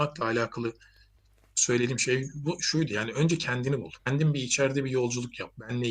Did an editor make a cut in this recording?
yes; 1 cut; at 4.0 s

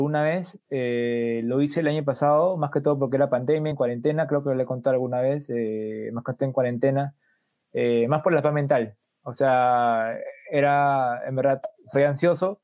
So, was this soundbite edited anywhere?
no; 0 cuts

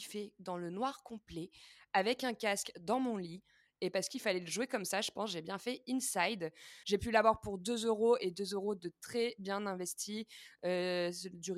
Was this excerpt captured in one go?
no; 1 cut; at 6.8 s

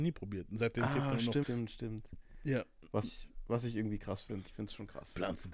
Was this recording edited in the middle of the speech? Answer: yes; 3 cuts; at 1.4 s, 3.0 s, 4.5 s

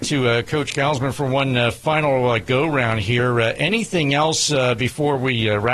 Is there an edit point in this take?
no; 0 cuts

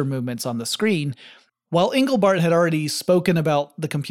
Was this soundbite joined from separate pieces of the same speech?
yes; 1 cut; at 1.5 s

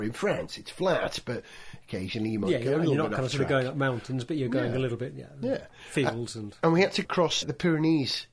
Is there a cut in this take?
no; 0 cuts

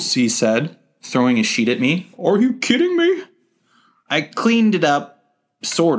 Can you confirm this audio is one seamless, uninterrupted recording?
no; 1 cut; at 4.0 s

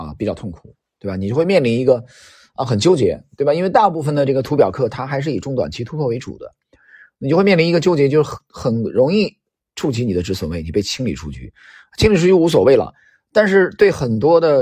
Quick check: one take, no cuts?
yes; 0 cuts

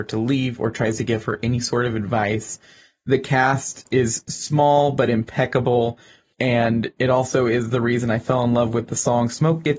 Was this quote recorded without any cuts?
yes; 0 cuts

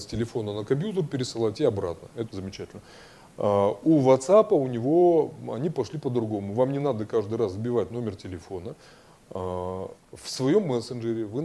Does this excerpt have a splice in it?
yes; 2 cuts; at 2.3 s, 10.0 s

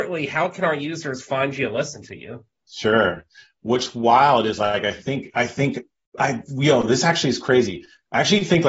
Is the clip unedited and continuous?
yes; 0 cuts

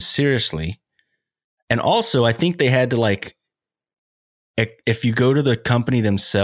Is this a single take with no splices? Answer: yes; 0 cuts

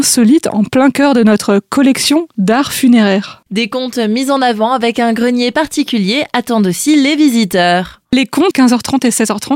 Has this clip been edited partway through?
yes; 1 cut; at 8.5 s

